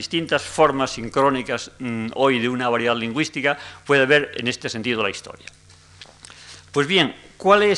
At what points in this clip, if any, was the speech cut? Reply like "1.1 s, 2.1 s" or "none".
none